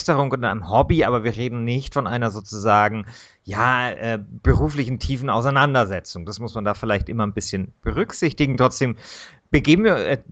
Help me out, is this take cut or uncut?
uncut